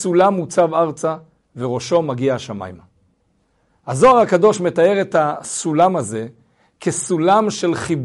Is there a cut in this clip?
no; 0 cuts

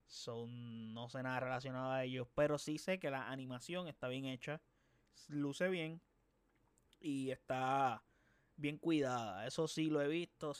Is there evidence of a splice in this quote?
no; 0 cuts

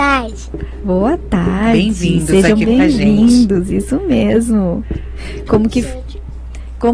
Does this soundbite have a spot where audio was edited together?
no; 0 cuts

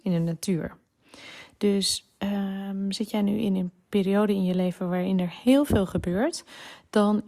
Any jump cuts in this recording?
no; 0 cuts

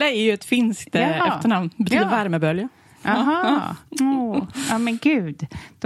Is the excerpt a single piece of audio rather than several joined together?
yes; 0 cuts

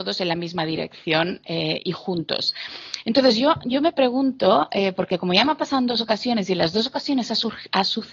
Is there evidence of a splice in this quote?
no; 0 cuts

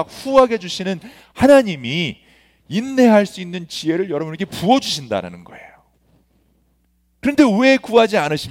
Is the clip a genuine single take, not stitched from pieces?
yes; 0 cuts

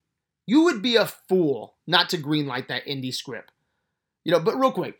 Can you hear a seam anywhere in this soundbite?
no; 0 cuts

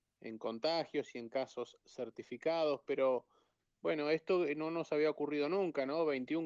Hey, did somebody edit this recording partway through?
no; 0 cuts

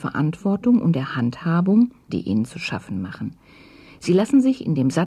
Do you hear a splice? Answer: yes; 1 cut; at 2.1 s

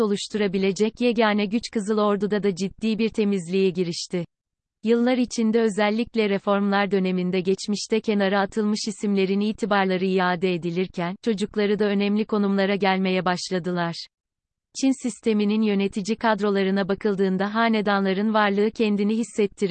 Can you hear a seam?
yes; 1 cut; at 4.7 s

